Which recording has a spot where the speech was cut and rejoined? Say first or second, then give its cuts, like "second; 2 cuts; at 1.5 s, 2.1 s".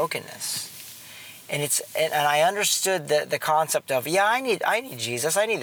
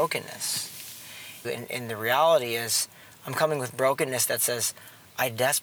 second; 1 cut; at 1.4 s